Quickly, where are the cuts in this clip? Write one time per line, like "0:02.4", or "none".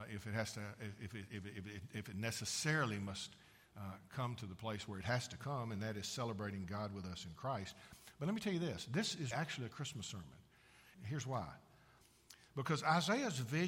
0:09.3
0:10.9

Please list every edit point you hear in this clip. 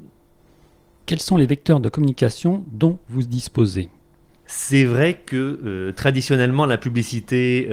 0:00.9

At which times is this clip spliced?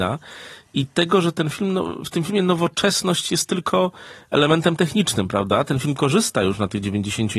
none

